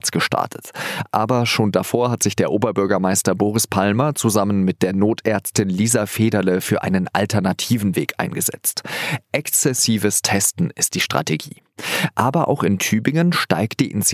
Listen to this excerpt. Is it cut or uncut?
uncut